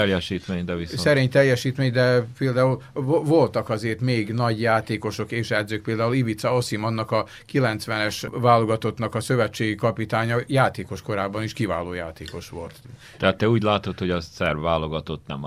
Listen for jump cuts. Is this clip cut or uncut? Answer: uncut